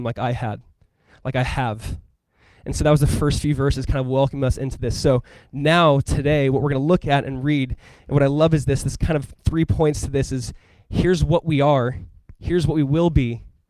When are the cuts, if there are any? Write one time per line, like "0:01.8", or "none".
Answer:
none